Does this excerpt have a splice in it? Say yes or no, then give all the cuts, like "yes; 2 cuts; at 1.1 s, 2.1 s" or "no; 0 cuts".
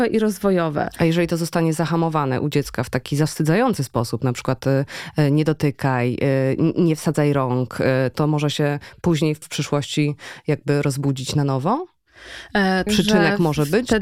yes; 3 cuts; at 8.1 s, 9.4 s, 12.9 s